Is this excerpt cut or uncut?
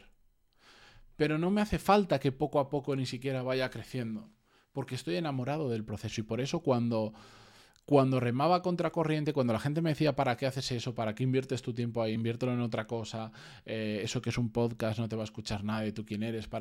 uncut